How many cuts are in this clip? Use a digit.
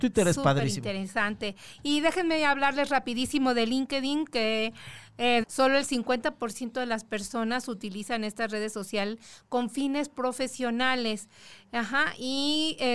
1